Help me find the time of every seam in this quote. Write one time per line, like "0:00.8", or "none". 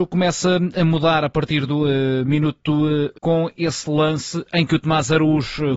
0:03.1